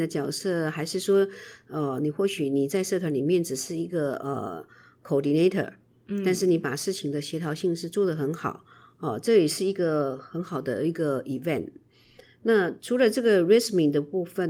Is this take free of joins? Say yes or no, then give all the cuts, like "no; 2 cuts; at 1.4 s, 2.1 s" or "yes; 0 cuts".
yes; 0 cuts